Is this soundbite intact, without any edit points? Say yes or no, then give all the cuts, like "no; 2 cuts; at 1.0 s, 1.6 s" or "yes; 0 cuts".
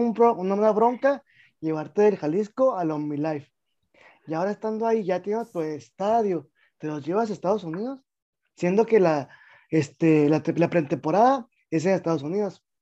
yes; 0 cuts